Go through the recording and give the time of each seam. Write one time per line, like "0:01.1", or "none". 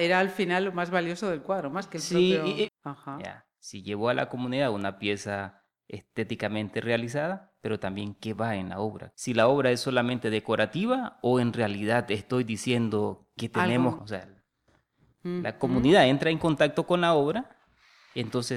0:02.7
0:09.1
0:14.0